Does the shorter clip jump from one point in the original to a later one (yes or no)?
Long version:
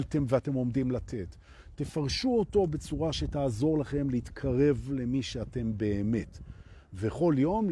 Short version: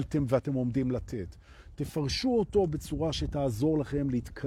no